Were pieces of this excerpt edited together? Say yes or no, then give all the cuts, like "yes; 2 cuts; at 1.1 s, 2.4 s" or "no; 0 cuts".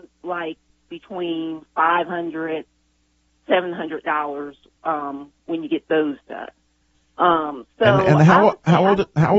no; 0 cuts